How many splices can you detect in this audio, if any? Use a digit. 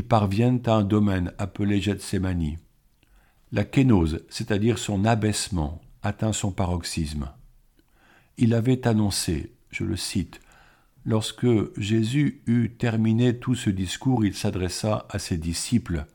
1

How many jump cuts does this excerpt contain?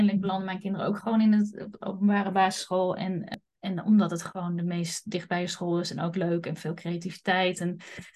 0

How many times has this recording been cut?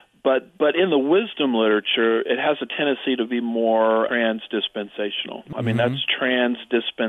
2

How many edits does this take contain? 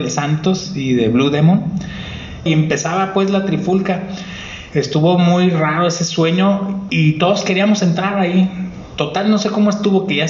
3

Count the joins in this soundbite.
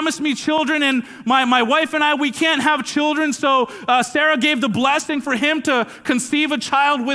0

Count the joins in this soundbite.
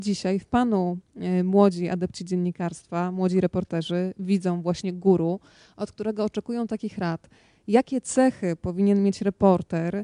0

